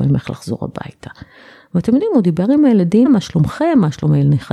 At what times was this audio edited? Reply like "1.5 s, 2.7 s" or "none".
3.0 s

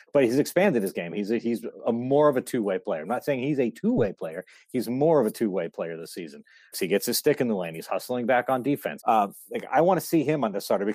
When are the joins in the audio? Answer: 6.7 s, 9.0 s

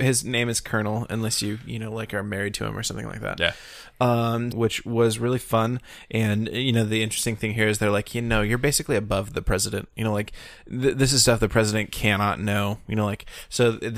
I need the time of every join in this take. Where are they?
4.5 s

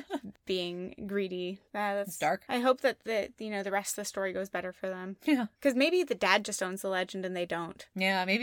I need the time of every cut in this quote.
1.7 s

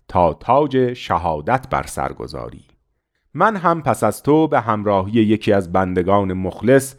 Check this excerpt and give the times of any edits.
none

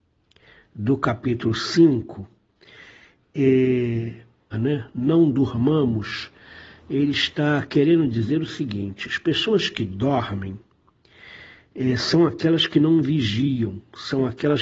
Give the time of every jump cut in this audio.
4.5 s

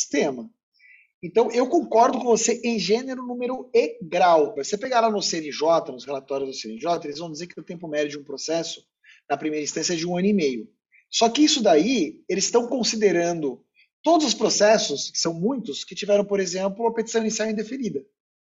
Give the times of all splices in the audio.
4.6 s

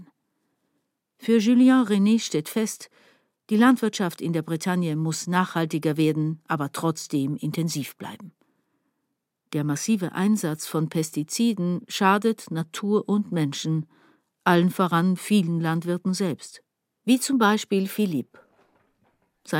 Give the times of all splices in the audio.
none

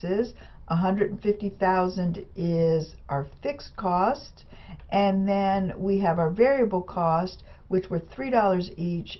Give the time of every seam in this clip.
none

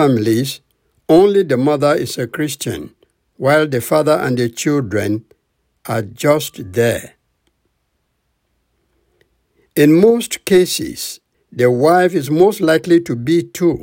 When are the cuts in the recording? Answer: 11.3 s

